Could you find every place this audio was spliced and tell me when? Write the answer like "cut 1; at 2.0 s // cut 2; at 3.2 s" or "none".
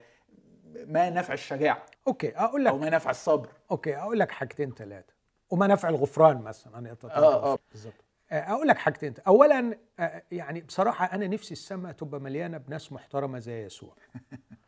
cut 1; at 1.9 s // cut 2; at 7.6 s